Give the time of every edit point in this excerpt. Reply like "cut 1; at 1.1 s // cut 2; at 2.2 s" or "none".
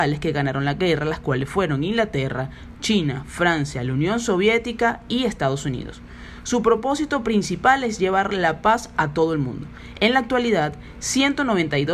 none